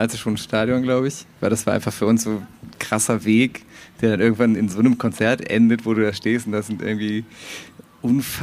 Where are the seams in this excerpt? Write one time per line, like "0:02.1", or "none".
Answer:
none